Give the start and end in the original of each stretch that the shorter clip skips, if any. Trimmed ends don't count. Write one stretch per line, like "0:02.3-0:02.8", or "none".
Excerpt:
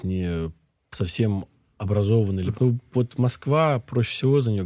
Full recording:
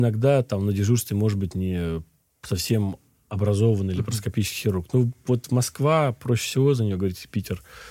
0:04.1-0:04.9